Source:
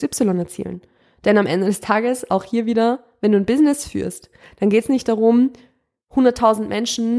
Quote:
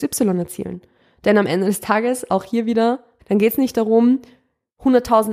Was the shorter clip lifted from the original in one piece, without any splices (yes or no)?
no